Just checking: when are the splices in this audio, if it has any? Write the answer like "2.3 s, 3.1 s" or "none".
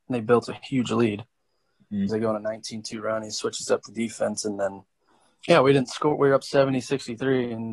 2.1 s